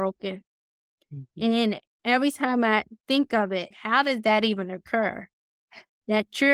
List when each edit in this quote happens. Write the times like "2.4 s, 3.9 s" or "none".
3.7 s